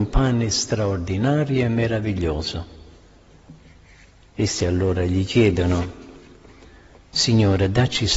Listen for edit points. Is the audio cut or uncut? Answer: uncut